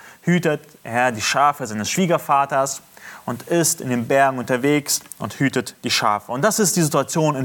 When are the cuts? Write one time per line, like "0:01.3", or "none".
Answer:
none